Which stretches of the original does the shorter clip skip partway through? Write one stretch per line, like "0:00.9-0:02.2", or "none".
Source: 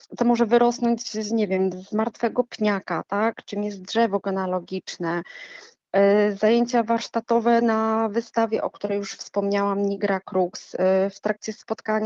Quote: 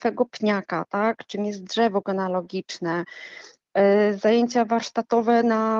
none